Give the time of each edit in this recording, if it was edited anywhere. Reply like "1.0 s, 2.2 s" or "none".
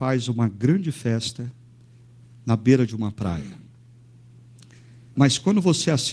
5.1 s